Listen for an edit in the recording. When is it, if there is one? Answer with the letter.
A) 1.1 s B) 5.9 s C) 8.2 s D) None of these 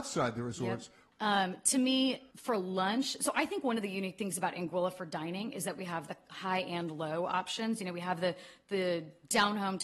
A